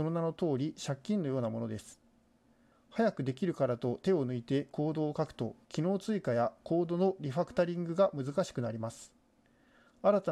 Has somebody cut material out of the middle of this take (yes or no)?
yes